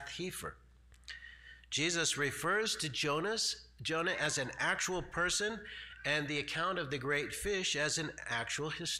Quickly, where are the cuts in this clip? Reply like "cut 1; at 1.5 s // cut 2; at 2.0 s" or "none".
none

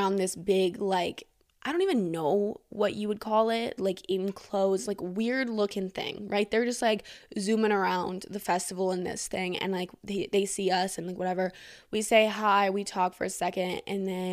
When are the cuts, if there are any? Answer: cut 1; at 3.8 s

